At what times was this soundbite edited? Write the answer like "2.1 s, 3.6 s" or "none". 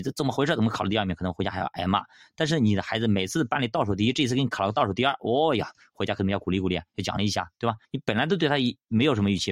7.8 s